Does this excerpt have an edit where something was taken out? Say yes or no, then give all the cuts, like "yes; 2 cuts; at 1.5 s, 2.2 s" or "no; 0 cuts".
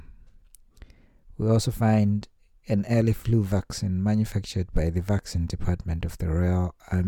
no; 0 cuts